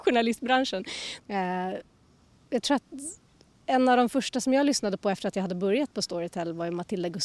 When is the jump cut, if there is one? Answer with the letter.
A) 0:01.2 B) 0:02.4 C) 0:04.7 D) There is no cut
A